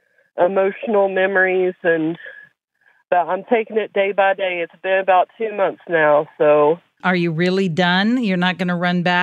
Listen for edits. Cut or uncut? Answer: cut